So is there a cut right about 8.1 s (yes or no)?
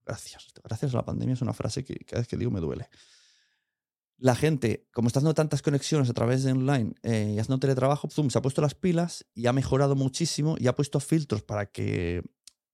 yes